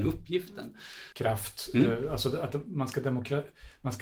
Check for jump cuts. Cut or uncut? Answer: cut